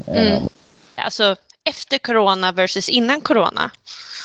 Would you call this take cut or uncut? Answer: cut